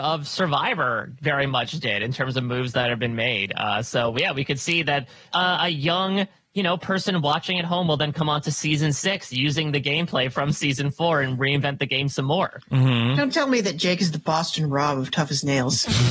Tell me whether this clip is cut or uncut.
cut